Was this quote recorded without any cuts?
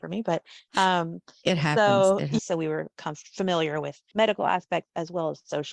no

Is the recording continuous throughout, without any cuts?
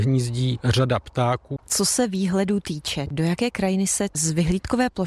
no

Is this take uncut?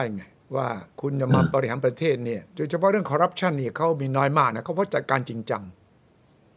no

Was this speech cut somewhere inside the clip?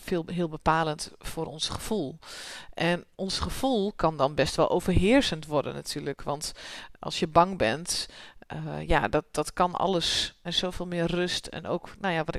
yes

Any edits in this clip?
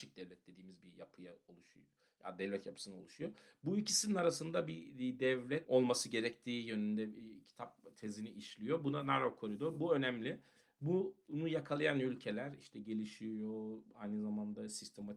no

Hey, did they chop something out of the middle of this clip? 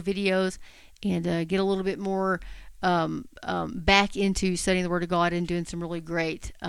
no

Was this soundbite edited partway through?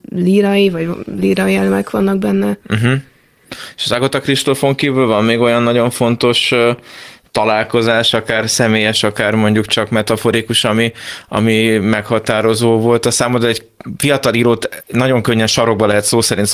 no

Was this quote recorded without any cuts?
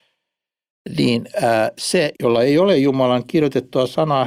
no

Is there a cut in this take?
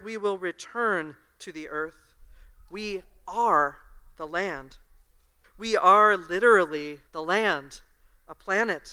yes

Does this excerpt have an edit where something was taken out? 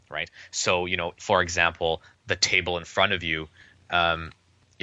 yes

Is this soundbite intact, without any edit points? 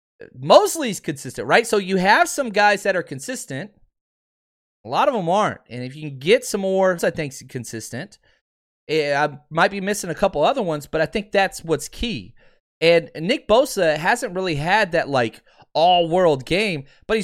no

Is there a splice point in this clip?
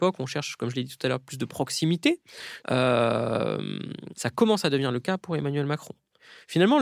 yes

